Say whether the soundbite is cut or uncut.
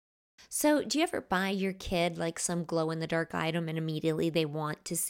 uncut